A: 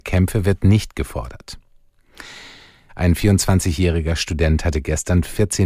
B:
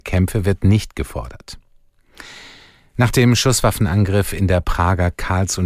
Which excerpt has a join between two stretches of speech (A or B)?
A